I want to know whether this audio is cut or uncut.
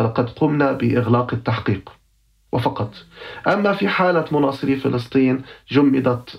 uncut